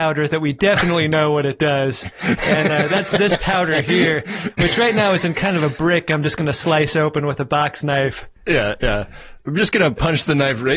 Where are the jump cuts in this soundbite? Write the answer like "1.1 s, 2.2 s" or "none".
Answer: 8.4 s